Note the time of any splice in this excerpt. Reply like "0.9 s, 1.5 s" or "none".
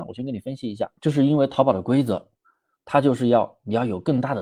1.0 s